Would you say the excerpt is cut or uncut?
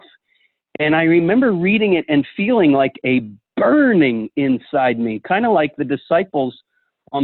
uncut